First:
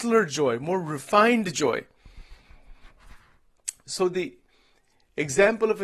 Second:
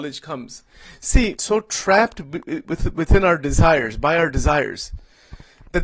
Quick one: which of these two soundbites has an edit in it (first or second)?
second